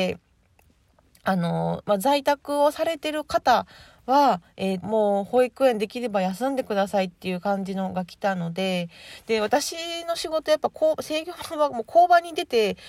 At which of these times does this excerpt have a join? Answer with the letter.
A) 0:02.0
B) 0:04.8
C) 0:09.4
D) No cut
B